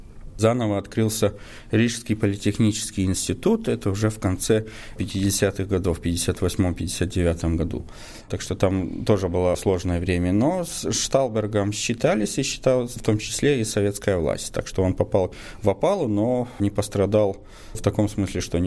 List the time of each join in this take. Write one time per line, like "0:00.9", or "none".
none